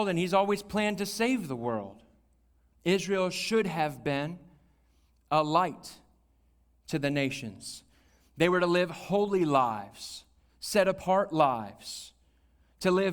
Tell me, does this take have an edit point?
yes; 1 cut; at 2.7 s

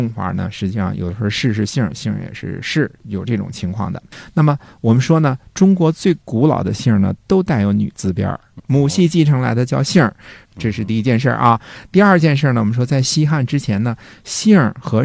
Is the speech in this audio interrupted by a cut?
yes; 2 cuts; at 8.6 s, 10.4 s

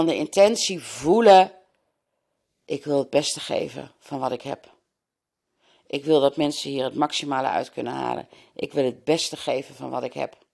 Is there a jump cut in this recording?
no; 0 cuts

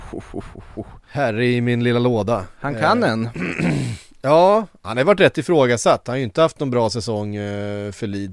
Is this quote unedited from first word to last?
yes; 0 cuts

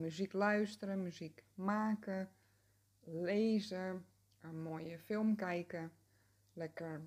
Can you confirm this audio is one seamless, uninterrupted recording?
yes; 0 cuts

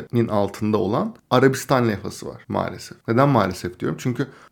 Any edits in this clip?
yes; 1 cut; at 3.0 s

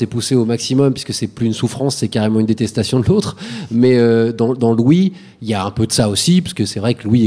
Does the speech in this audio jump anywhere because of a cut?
no; 0 cuts

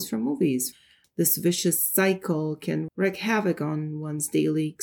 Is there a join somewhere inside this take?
yes; 2 cuts; at 1.0 s, 2.9 s

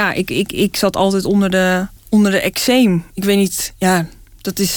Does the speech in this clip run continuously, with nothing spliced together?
no; 1 cut; at 2.0 s

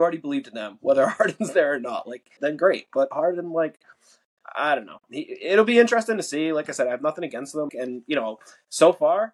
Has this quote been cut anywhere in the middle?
yes; 2 cuts; at 2.4 s, 7.7 s

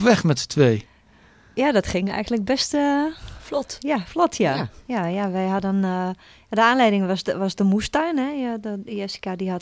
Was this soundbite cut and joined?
no; 0 cuts

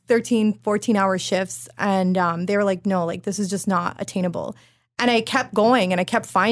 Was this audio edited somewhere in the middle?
no; 0 cuts

